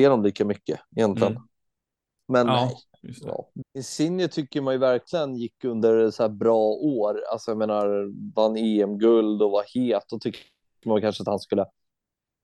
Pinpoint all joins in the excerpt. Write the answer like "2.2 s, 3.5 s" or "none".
2.2 s, 3.6 s